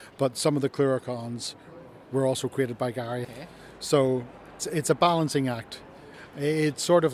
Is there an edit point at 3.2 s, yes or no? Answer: yes